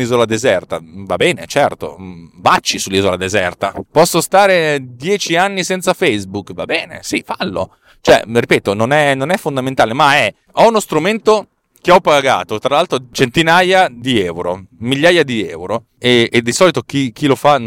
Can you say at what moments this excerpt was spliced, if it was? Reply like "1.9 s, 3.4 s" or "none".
3.9 s